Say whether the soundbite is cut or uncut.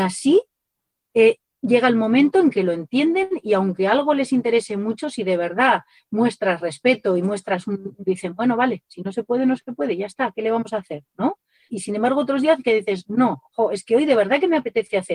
cut